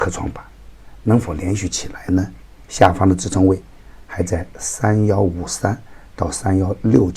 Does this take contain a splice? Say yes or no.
yes